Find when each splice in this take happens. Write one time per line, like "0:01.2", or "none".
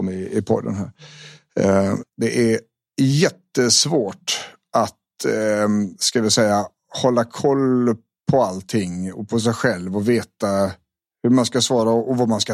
0:02.0